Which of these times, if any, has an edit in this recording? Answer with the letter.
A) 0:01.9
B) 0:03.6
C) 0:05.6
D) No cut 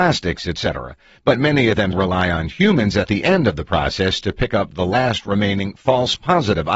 A